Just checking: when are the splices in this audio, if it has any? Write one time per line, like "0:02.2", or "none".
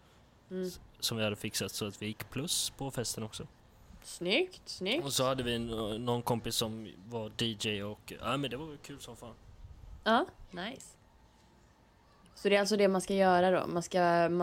none